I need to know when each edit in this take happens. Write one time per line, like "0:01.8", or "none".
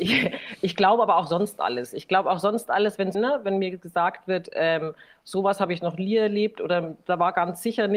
0:03.1